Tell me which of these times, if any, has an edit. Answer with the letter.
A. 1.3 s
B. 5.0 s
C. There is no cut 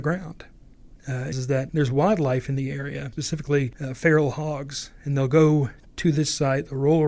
A